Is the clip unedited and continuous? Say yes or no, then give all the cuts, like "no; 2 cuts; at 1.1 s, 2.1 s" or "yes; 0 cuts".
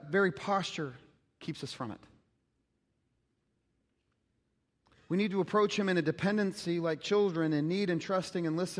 yes; 0 cuts